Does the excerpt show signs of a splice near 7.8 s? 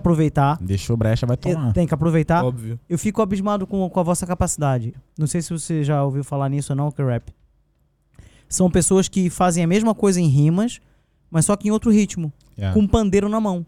no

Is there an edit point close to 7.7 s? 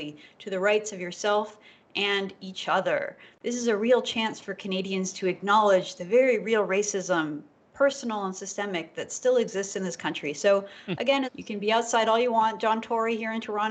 no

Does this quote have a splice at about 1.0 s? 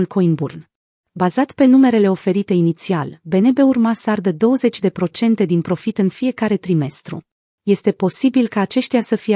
yes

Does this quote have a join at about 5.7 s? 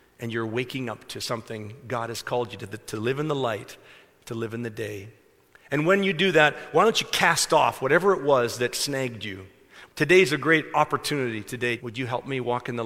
no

